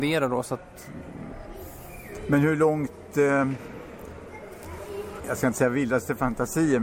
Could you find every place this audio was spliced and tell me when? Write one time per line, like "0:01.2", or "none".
0:05.2